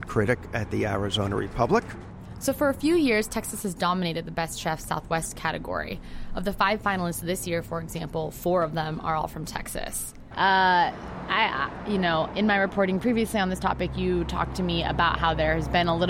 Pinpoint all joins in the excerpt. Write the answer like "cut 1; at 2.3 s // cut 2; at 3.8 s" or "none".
cut 1; at 10.3 s